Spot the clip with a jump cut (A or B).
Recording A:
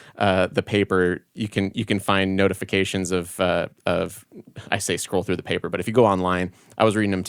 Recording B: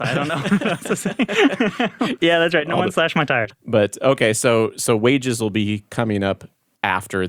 B